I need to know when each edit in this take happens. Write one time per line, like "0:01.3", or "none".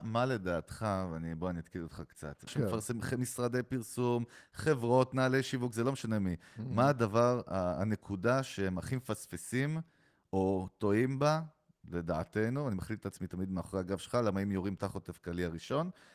0:02.5